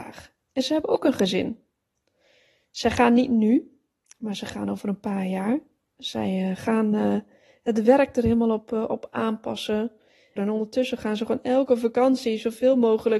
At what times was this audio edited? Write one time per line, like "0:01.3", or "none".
0:10.4